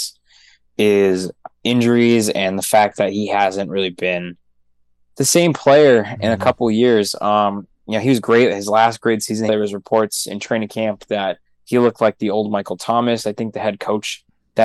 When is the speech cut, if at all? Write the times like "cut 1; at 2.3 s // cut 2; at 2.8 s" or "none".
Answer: cut 1; at 9.5 s